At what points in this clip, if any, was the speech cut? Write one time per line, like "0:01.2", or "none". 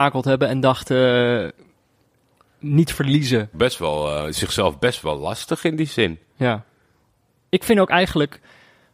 0:03.5